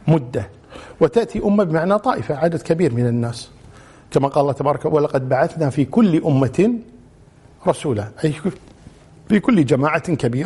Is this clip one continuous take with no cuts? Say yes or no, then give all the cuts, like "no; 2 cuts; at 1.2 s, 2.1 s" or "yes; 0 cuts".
yes; 0 cuts